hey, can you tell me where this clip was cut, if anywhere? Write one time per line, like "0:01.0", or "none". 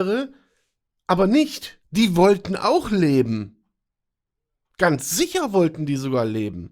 0:01.8

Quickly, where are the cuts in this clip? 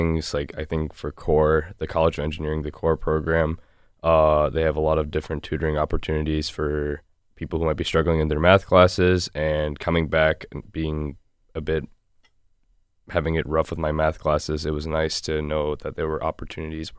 none

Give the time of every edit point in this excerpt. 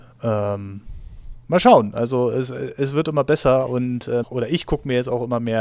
0:04.2

